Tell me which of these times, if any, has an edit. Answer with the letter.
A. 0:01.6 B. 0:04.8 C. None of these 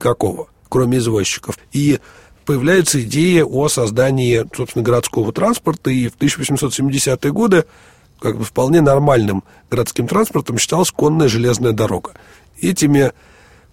A